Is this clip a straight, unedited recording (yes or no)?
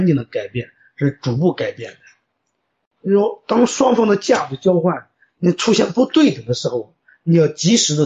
yes